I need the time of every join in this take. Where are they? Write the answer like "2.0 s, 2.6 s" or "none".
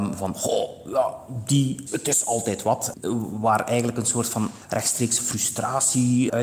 1.9 s